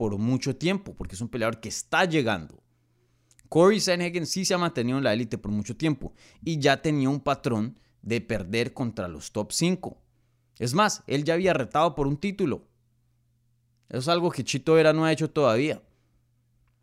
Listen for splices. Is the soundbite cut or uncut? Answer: uncut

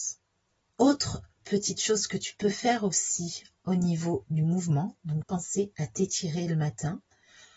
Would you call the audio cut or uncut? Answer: cut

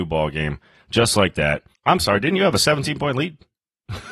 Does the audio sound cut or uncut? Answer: cut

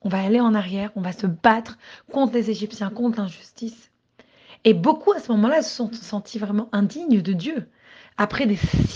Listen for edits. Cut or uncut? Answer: uncut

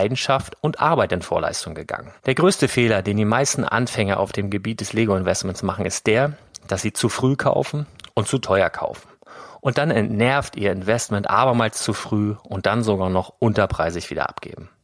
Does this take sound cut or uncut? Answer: cut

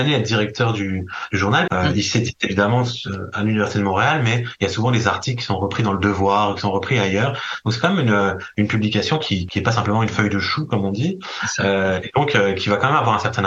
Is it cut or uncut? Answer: cut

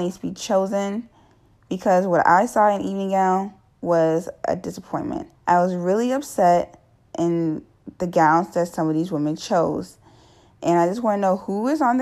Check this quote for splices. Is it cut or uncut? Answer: cut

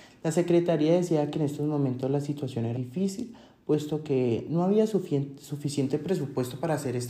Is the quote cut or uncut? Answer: cut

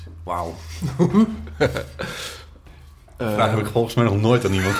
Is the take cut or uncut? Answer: uncut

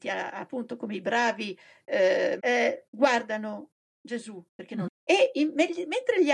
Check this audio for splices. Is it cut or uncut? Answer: cut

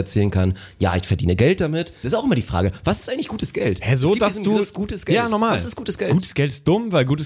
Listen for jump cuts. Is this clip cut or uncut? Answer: cut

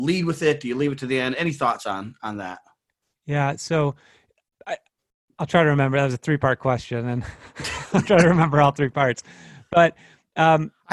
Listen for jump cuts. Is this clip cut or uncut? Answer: uncut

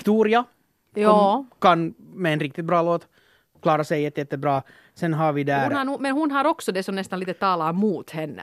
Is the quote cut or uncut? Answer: uncut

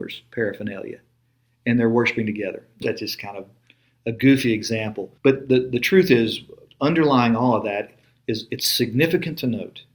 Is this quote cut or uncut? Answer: cut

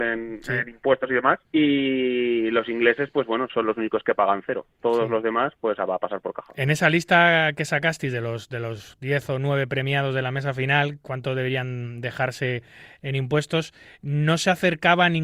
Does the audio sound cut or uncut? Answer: cut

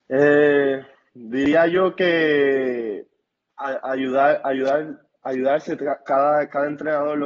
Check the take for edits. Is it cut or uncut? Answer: uncut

